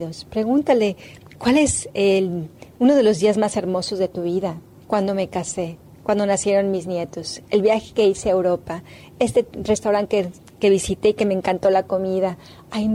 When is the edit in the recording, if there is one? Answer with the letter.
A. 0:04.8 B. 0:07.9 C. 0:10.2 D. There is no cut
A